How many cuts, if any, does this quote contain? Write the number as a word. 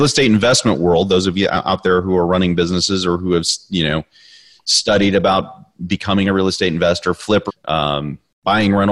one